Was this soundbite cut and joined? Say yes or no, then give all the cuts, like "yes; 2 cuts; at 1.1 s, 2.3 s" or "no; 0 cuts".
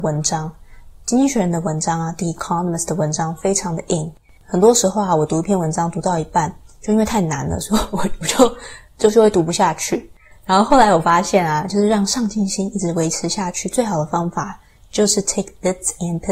yes; 1 cut; at 11.7 s